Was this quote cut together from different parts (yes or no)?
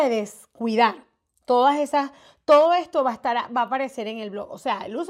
no